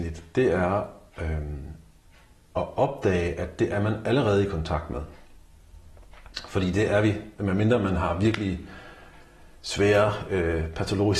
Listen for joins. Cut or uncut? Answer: uncut